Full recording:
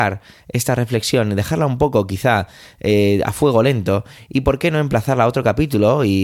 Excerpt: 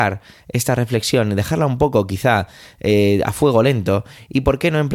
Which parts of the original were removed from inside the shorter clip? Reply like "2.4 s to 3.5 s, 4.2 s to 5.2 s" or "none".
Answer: none

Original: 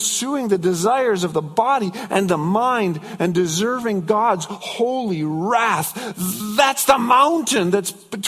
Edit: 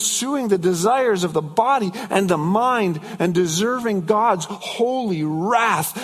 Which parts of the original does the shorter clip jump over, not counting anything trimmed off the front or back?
none

